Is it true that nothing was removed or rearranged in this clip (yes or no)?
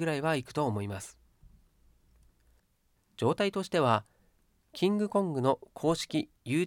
no